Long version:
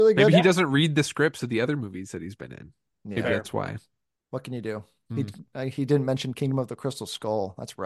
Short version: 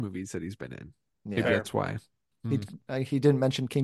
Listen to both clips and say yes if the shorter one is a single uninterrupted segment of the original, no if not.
no